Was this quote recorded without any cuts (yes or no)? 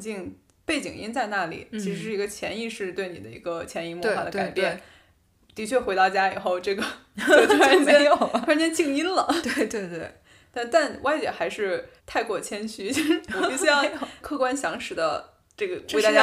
no